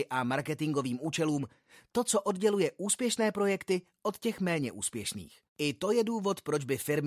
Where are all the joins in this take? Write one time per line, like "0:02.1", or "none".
0:05.5